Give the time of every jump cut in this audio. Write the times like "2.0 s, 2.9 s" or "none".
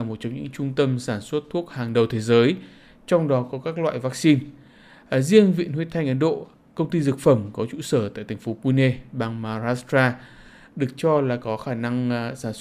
none